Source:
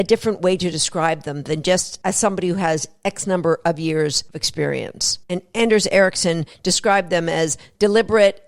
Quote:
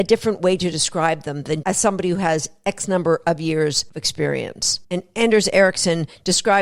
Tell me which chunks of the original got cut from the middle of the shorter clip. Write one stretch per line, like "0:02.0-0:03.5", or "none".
0:01.6-0:02.0